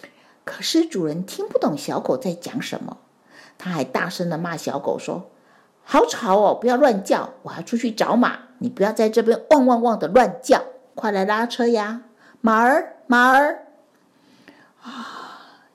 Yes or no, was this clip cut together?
yes